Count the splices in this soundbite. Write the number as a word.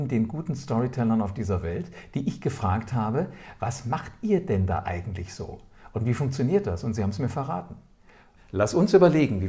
one